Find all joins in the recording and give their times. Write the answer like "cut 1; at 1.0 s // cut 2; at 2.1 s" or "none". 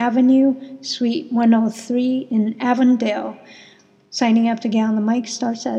none